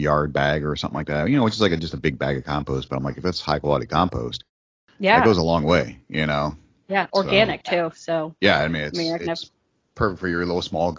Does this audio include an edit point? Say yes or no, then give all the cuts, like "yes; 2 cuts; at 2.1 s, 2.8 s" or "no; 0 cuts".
no; 0 cuts